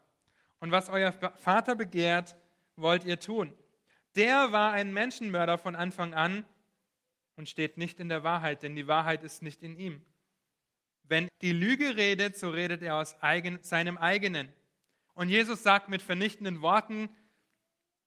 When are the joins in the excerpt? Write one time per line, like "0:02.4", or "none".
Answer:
0:11.3
0:15.1